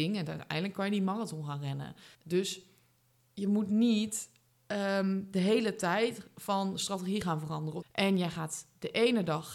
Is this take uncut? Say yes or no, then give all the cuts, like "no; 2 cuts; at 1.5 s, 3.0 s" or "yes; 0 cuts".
no; 2 cuts; at 2.1 s, 7.8 s